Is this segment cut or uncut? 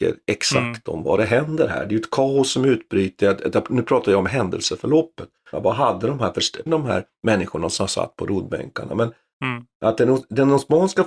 cut